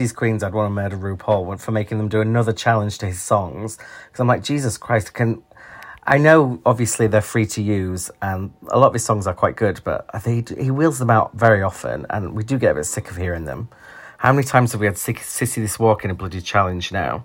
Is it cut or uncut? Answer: uncut